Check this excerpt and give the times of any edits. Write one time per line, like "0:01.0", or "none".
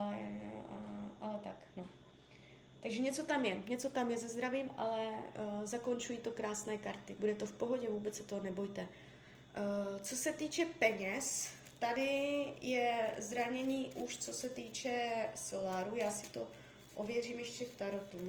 0:07.2